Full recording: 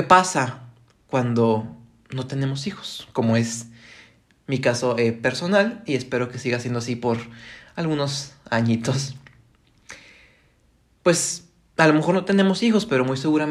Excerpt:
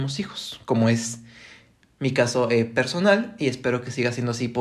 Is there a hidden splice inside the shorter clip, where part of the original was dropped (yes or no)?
no